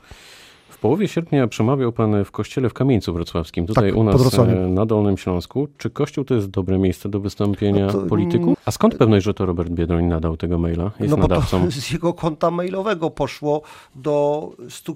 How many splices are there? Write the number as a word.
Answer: one